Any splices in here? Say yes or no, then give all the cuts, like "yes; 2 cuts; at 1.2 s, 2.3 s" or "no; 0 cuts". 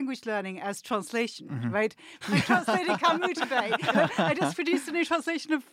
yes; 1 cut; at 2.2 s